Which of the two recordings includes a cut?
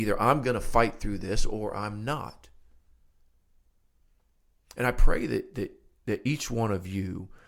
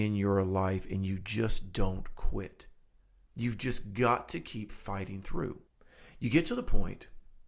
second; 1 cut; at 3.3 s

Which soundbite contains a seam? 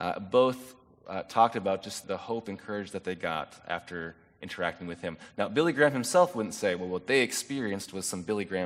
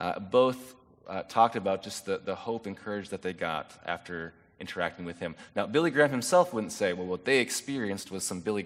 first; 1 cut; at 2.0 s

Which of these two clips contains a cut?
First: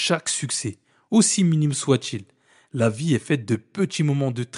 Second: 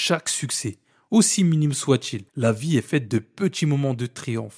second; 1 cut; at 2.3 s

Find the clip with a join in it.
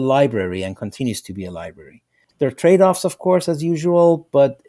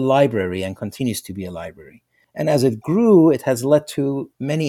first; 1 cut; at 2.3 s

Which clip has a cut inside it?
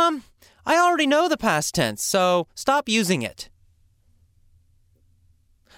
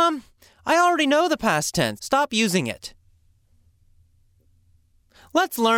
second; 1 cut; at 2.0 s

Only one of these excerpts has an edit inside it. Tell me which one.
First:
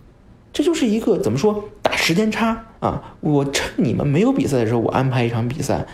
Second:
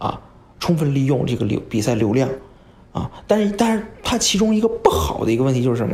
first; 1 cut; at 2.8 s

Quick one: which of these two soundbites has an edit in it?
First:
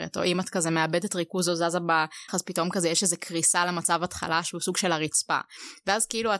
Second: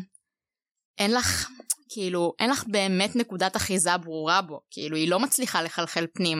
first; 1 cut; at 2.3 s

